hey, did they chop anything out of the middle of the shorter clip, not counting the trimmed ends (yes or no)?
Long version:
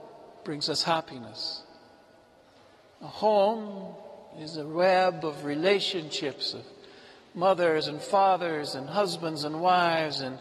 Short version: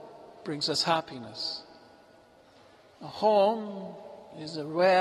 no